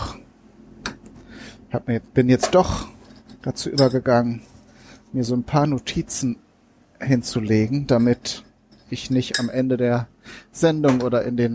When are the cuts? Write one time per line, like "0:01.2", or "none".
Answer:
none